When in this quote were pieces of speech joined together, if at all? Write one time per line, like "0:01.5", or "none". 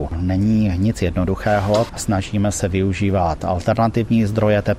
0:01.9